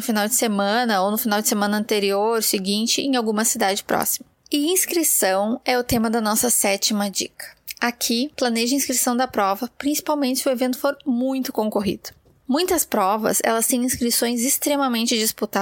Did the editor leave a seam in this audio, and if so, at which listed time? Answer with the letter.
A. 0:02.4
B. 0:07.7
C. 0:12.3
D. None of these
D